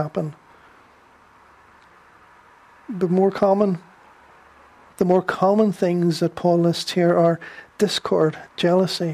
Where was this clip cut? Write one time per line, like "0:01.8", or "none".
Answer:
0:04.9